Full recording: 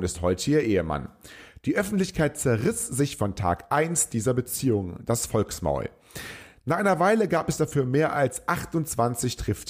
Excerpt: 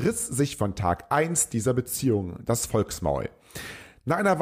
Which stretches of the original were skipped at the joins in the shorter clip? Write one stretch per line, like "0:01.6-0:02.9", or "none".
none